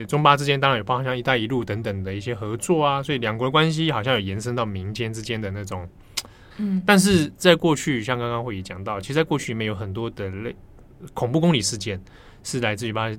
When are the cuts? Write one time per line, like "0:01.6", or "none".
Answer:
0:06.5

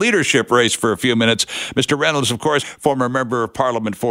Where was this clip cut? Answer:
0:02.6

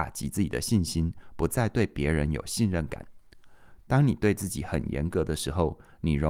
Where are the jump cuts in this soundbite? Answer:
0:03.8

